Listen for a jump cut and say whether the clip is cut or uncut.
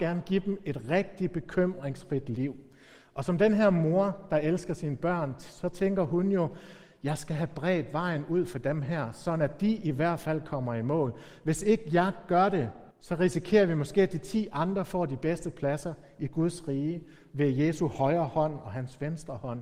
cut